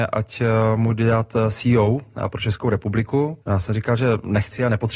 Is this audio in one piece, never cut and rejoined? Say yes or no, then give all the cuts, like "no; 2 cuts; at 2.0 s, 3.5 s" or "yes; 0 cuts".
no; 1 cut; at 3.4 s